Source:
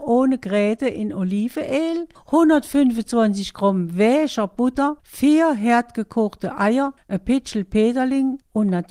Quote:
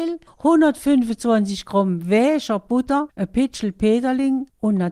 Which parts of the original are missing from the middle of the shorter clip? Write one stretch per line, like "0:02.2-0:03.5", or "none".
0:05.0-0:07.0